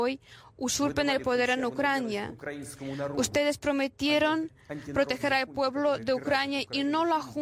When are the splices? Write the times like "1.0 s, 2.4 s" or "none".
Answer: none